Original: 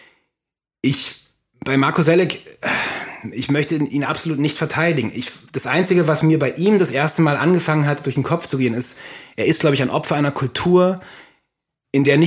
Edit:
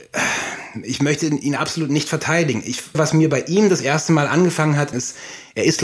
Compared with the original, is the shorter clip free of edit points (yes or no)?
no